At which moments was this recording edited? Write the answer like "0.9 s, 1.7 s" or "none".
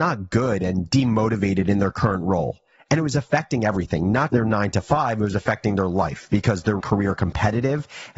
4.3 s, 6.8 s